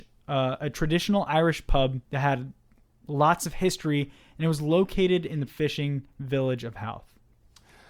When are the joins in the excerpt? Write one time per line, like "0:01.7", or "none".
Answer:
0:02.0
0:05.5